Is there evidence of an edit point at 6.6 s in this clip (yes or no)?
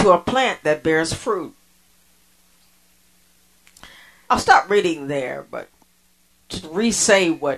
yes